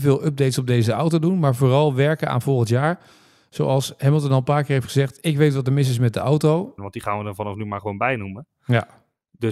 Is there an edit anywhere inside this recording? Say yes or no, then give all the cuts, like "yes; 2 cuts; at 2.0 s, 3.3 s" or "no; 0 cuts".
yes; 1 cut; at 6.8 s